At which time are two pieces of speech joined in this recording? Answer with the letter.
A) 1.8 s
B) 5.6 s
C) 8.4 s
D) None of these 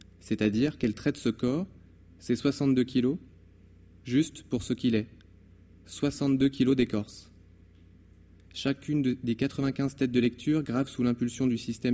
D